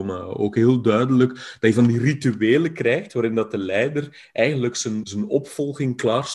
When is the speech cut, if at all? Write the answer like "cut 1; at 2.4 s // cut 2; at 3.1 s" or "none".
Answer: cut 1; at 5.0 s